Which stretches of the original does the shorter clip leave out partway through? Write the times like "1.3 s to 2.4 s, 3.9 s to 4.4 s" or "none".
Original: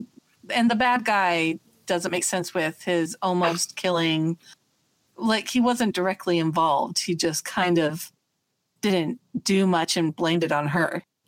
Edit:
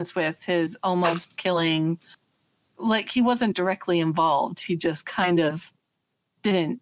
none